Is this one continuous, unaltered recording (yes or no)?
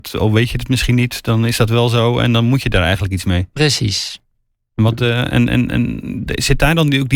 yes